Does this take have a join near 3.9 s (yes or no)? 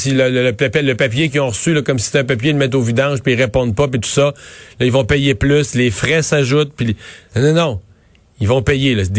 no